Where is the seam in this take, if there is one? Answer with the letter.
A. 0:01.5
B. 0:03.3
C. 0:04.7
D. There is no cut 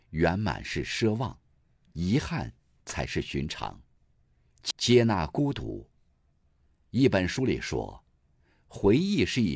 C